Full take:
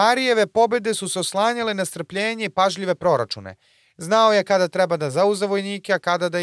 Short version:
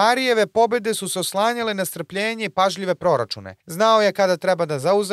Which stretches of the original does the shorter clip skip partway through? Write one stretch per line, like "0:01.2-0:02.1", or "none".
0:03.6-0:03.9